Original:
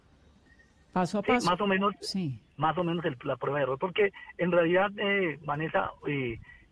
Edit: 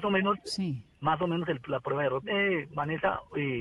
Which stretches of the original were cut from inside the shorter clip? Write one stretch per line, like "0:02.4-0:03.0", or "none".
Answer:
0:03.8-0:04.9